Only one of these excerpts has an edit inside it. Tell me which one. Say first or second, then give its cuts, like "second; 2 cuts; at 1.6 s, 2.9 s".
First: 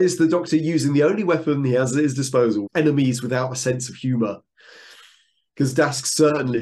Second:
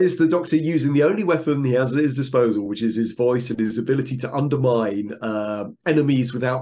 first; 1 cut; at 2.7 s